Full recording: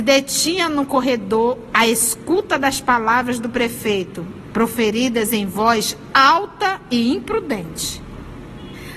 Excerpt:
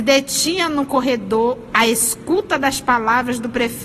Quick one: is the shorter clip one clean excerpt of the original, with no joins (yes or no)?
yes